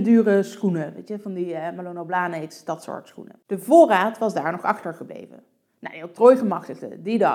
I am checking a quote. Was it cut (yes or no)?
no